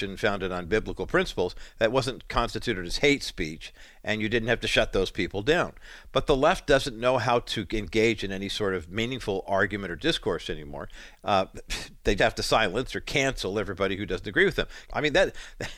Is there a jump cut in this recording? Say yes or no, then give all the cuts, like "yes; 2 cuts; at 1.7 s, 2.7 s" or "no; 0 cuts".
yes; 3 cuts; at 11.1 s, 12.2 s, 14.8 s